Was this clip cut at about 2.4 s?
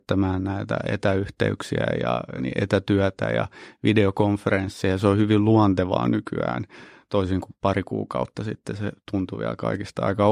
yes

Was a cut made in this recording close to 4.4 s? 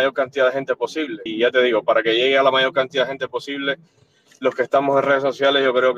no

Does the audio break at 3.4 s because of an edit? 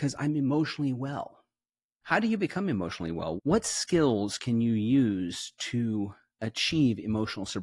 yes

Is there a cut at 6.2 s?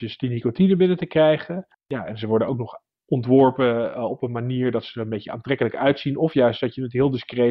no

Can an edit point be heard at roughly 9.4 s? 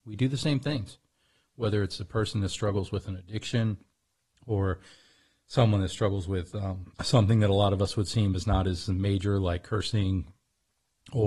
no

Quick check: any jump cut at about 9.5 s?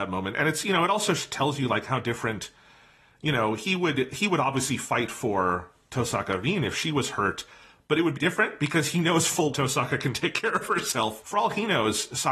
yes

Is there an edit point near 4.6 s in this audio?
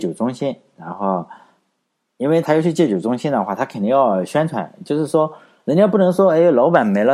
no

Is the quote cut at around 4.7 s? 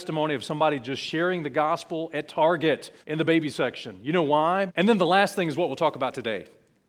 yes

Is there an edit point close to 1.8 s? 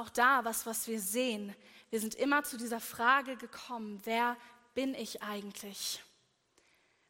no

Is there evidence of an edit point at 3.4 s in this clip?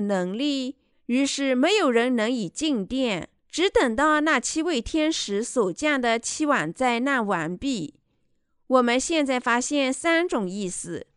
yes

